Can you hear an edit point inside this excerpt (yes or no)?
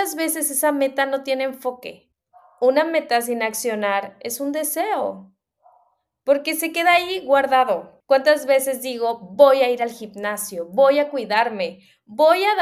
yes